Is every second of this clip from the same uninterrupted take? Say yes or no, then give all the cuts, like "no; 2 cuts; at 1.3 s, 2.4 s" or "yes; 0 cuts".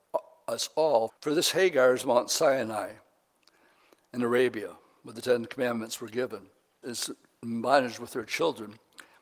no; 2 cuts; at 1.1 s, 6.8 s